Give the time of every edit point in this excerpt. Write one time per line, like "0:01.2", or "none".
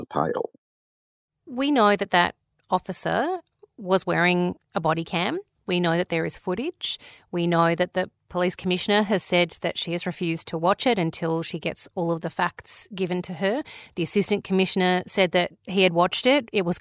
none